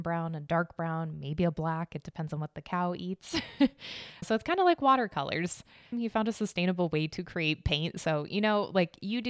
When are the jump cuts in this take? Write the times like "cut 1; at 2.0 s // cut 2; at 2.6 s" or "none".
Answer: cut 1; at 4.2 s // cut 2; at 5.9 s